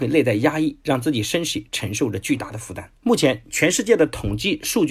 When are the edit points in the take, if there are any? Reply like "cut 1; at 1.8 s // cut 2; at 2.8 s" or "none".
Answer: cut 1; at 3.0 s